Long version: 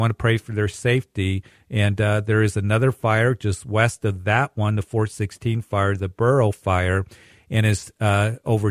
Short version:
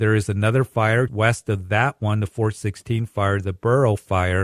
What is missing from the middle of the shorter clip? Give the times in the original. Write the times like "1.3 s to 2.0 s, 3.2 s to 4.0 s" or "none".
3.3 s to 3.6 s